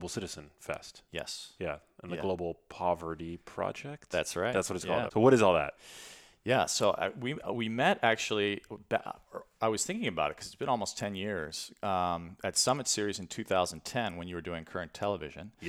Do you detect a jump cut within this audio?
yes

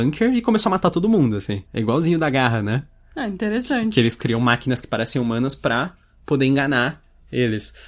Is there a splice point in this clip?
yes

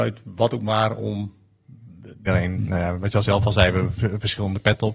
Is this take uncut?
no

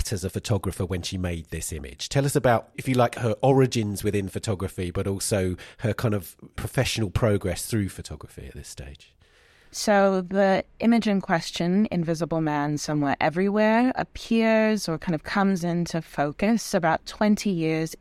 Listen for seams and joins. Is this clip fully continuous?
yes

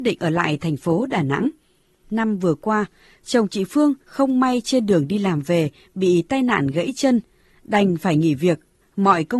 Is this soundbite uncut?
yes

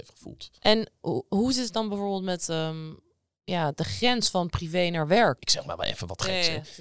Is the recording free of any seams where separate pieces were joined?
no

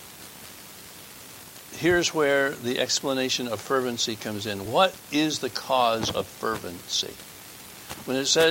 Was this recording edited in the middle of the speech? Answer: no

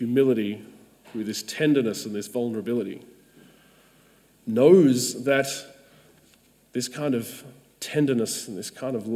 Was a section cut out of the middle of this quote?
yes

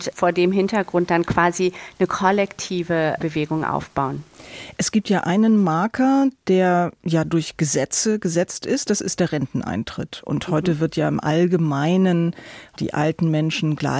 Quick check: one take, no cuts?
yes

